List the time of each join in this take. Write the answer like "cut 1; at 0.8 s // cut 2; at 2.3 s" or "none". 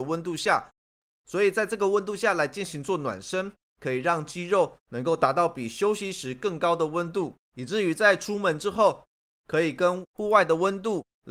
none